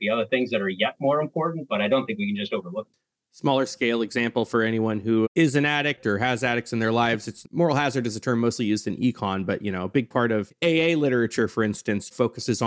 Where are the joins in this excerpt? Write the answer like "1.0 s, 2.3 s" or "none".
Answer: none